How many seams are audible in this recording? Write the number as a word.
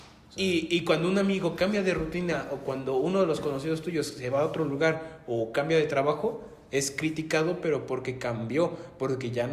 zero